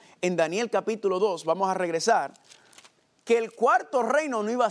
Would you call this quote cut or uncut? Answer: uncut